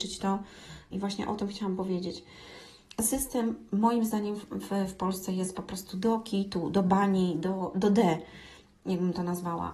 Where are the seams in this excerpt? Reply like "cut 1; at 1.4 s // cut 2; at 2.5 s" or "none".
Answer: cut 1; at 0.9 s